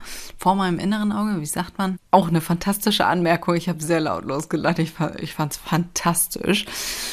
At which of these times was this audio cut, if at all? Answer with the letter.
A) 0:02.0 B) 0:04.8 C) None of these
A